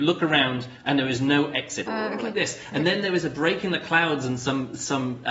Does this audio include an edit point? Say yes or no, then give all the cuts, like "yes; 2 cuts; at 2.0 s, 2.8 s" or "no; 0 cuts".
yes; 1 cut; at 1.9 s